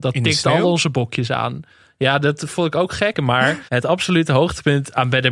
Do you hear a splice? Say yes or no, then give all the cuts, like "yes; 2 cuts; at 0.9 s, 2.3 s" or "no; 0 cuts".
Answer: yes; 1 cut; at 3.1 s